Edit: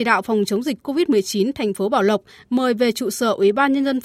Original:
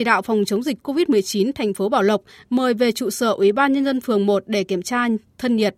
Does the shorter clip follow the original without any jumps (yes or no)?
yes